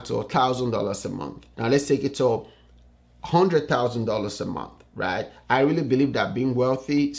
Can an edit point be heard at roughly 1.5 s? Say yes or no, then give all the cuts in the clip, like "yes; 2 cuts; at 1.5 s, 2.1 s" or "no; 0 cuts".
yes; 1 cut; at 1.5 s